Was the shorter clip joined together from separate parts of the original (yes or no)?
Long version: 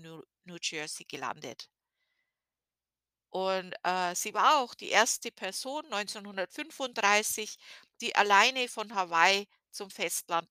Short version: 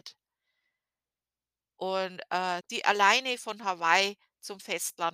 yes